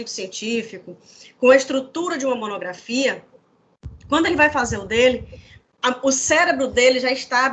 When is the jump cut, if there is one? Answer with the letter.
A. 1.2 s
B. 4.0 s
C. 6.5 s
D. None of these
D